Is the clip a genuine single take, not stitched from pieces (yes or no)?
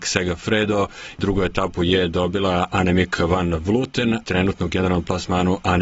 no